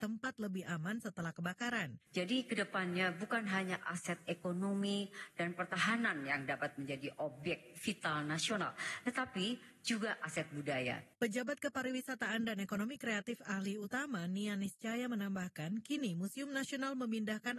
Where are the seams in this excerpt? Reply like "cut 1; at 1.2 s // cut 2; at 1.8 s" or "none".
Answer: cut 1; at 2.1 s // cut 2; at 11.1 s